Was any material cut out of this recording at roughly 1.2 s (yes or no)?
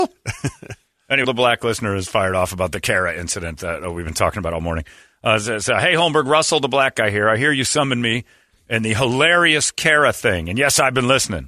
yes